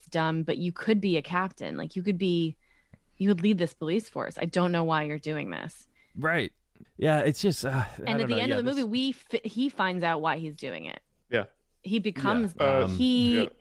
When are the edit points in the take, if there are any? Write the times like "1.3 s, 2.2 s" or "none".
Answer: 6.8 s, 12.5 s